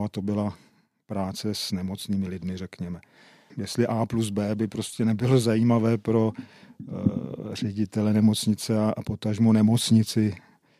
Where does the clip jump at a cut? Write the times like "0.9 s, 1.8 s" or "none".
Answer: 3.5 s